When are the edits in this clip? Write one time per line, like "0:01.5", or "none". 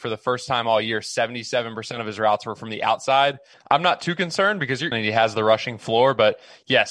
0:03.5
0:04.9